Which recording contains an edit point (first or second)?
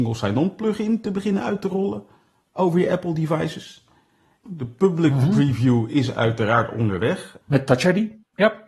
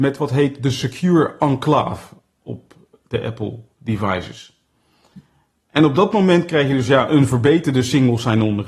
first